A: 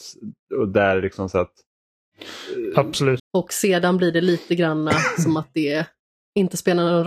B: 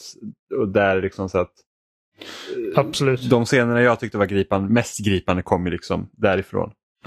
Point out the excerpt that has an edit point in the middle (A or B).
A